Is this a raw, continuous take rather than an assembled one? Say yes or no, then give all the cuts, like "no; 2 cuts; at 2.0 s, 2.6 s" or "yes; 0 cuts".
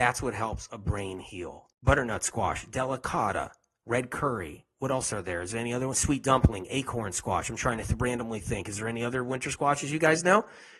no; 1 cut; at 1.7 s